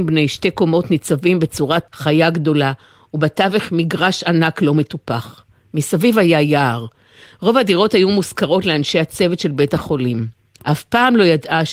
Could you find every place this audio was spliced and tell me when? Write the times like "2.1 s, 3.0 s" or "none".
1.9 s, 10.6 s